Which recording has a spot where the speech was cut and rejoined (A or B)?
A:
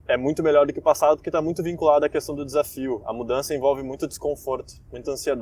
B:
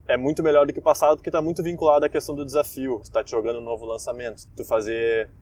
B